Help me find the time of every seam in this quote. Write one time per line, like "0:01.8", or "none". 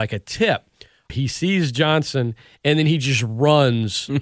0:01.1